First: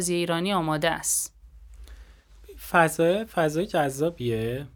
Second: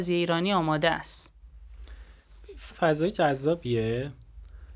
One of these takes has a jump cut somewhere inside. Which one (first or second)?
second